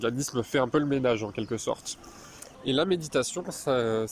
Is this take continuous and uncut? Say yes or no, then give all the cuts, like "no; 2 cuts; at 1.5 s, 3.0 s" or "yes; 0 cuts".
no; 1 cut; at 2.5 s